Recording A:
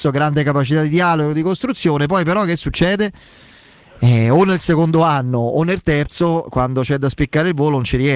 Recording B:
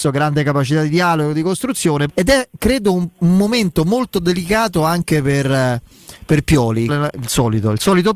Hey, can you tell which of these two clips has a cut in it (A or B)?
B